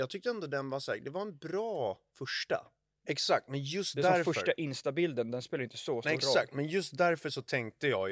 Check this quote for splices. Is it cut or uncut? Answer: cut